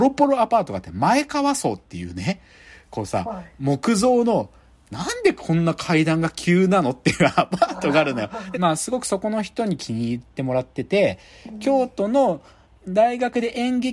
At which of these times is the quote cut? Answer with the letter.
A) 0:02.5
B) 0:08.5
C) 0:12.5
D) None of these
B